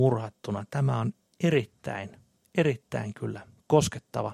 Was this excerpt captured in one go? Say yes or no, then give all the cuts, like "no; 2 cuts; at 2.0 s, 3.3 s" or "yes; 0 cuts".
yes; 0 cuts